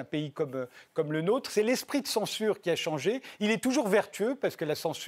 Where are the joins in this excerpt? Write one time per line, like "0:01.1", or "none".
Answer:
none